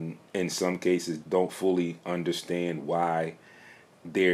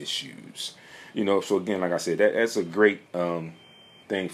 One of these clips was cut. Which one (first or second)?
first